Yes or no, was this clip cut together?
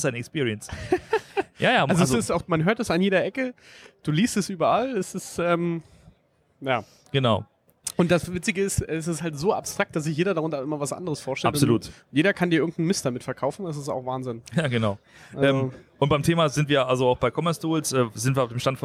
no